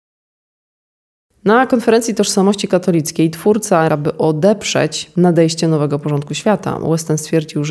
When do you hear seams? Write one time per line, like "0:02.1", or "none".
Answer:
0:03.9